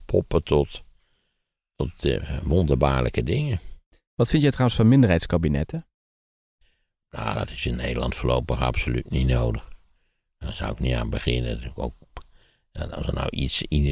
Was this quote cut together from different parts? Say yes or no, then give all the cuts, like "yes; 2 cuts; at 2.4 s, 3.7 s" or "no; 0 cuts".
no; 0 cuts